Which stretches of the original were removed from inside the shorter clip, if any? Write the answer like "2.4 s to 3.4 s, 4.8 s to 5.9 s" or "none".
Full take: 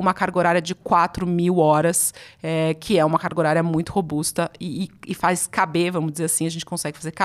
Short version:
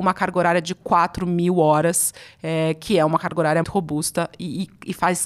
3.6 s to 3.8 s